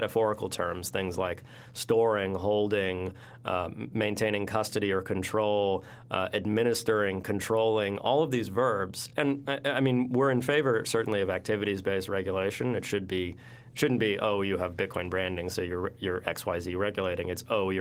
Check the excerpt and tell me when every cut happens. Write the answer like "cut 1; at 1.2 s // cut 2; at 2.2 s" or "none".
none